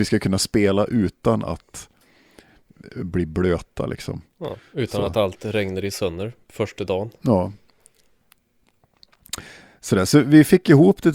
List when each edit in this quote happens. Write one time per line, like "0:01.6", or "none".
none